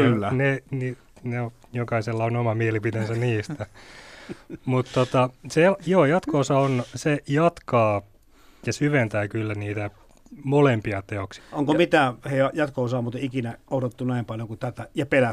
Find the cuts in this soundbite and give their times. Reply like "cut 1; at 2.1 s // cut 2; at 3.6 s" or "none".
cut 1; at 11.4 s